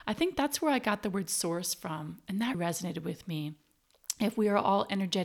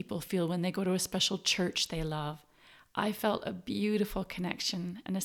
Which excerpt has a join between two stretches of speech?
first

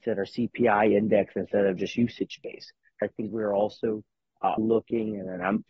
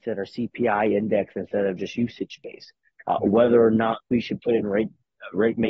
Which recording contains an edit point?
first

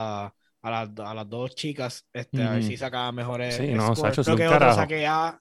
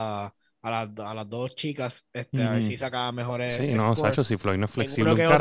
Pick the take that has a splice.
first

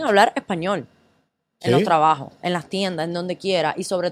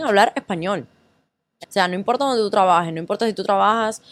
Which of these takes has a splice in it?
second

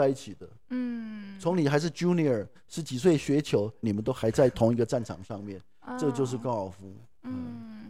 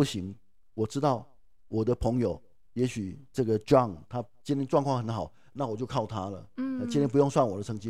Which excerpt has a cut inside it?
first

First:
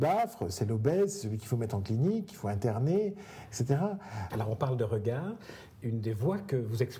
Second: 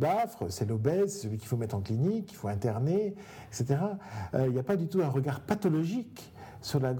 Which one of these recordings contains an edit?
first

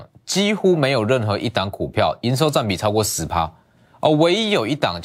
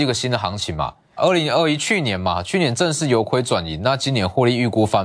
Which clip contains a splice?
second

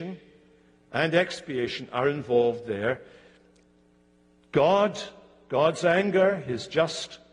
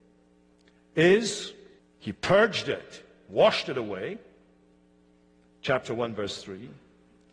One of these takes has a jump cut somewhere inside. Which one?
second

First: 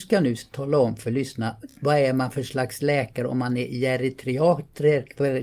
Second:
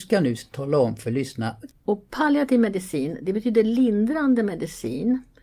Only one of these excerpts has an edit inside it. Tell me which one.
second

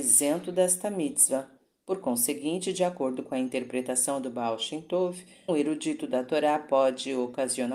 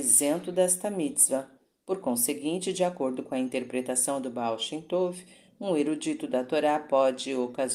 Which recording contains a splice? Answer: first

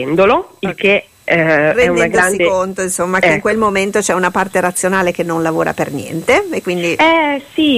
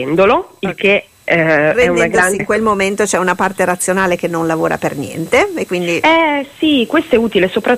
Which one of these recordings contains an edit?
second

